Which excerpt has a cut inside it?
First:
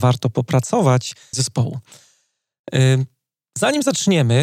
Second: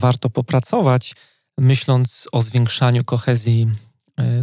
first; 1 cut; at 1.3 s

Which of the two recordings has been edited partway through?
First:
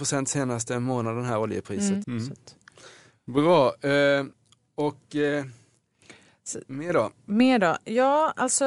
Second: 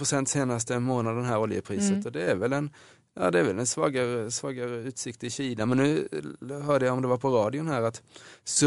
first; 1 cut; at 2.0 s

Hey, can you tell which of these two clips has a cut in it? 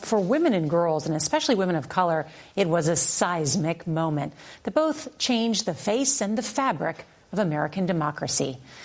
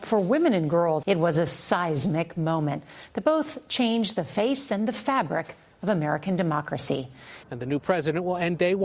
second; 2 cuts; at 1.0 s, 7.4 s

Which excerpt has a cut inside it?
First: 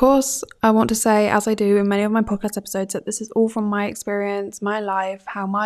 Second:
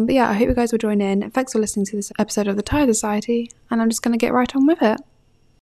second; 1 cut; at 2.1 s

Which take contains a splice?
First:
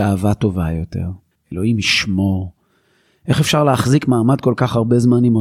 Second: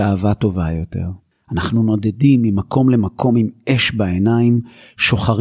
first; 1 cut; at 1.4 s

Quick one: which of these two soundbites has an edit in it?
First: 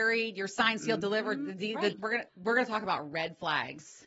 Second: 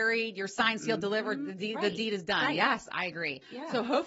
first; 1 cut; at 1.9 s

